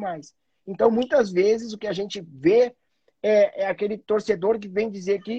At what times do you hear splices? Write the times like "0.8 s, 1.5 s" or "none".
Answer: none